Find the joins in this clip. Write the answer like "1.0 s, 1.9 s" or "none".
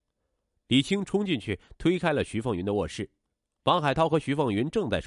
none